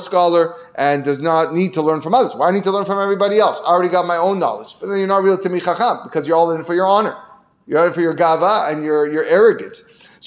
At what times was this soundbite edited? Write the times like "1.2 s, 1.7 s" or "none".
none